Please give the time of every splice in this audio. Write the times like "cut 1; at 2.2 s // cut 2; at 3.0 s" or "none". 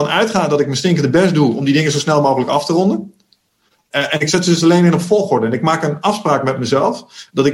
none